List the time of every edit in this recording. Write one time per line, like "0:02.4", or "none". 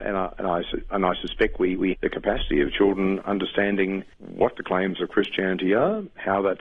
0:01.9
0:04.1